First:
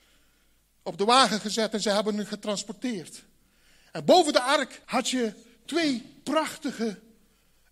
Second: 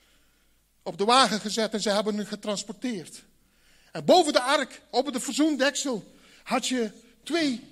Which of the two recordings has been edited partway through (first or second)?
first